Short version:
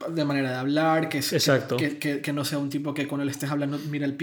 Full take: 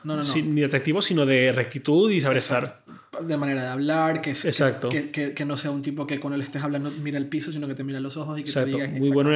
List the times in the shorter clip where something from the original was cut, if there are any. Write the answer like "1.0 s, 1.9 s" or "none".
none